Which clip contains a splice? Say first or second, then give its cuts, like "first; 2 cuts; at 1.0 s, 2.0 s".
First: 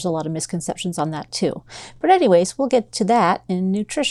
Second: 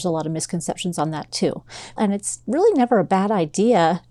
second; 1 cut; at 2.0 s